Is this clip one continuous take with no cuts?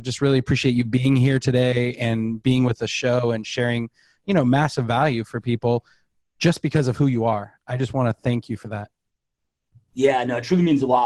yes; 0 cuts

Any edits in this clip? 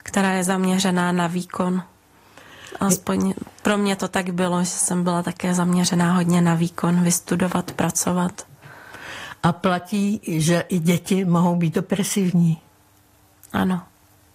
no; 0 cuts

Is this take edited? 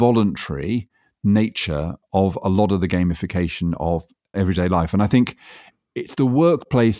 no; 0 cuts

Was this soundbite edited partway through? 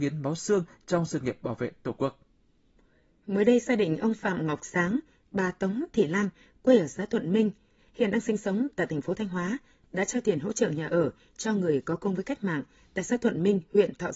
no; 0 cuts

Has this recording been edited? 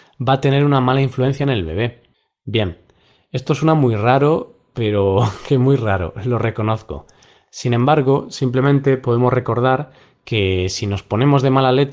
no; 0 cuts

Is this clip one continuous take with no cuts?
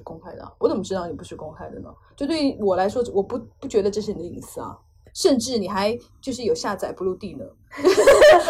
yes; 0 cuts

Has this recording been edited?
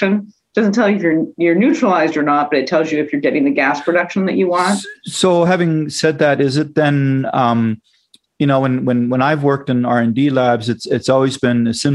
no; 0 cuts

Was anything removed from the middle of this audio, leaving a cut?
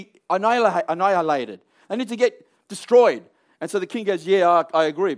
no; 0 cuts

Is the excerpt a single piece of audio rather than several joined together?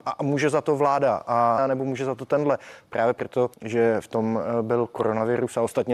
no; 2 cuts; at 1.6 s, 3.5 s

